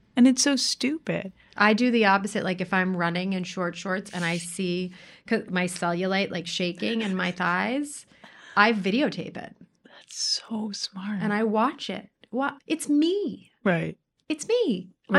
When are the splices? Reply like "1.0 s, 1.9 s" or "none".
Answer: 12.6 s